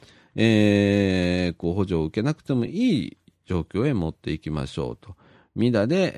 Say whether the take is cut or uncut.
uncut